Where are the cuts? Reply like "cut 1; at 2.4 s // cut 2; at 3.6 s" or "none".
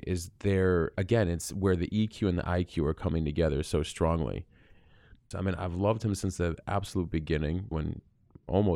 cut 1; at 5.3 s // cut 2; at 7.7 s